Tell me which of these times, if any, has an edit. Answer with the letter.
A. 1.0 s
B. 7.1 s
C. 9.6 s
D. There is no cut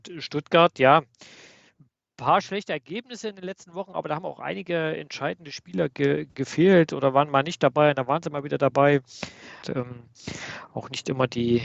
C